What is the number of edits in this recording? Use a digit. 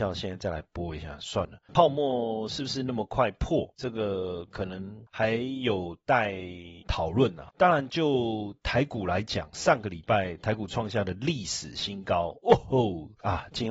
2